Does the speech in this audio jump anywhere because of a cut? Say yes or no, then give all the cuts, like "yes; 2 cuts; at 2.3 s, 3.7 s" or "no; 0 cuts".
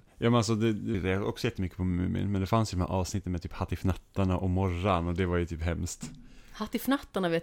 yes; 1 cut; at 0.9 s